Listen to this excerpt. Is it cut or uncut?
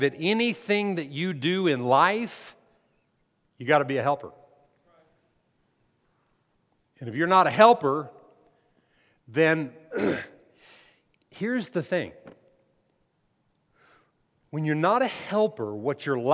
uncut